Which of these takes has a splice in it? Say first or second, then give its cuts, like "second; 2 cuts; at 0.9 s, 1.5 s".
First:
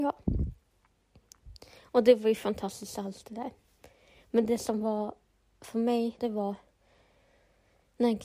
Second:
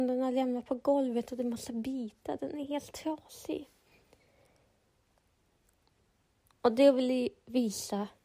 first; 1 cut; at 6.2 s